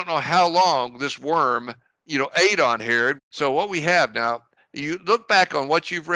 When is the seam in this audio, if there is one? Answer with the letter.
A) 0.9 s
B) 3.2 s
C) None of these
B